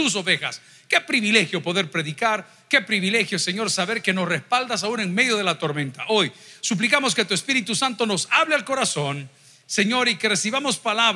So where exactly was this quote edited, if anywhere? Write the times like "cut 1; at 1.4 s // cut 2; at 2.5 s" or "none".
none